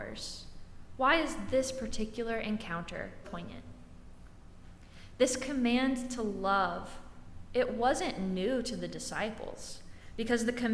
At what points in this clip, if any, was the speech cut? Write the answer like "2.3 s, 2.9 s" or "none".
3.2 s